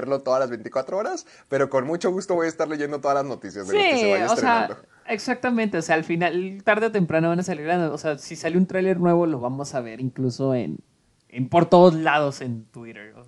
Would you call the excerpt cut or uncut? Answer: uncut